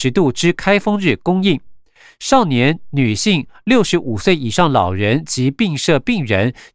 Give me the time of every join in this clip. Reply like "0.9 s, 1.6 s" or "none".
none